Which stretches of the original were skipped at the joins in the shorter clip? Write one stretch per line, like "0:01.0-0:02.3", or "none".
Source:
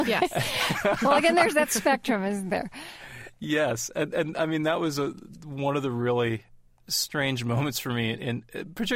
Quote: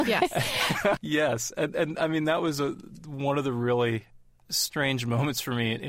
0:01.0-0:03.4